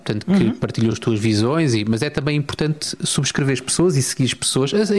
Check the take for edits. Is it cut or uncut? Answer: uncut